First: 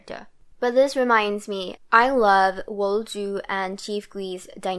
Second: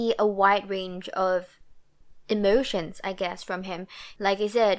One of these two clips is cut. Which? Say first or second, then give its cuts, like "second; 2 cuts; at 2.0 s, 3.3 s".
first; 1 cut; at 1.8 s